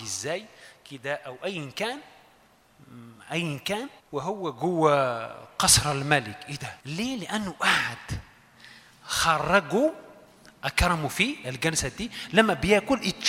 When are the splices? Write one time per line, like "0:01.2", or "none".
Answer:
0:04.0
0:06.8